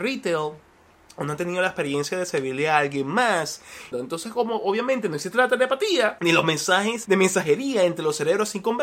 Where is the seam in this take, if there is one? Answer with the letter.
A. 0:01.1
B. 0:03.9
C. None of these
B